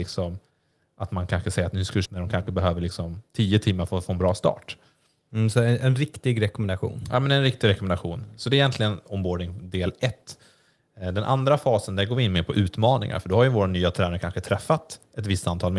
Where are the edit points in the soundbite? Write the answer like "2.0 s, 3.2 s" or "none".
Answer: 2.1 s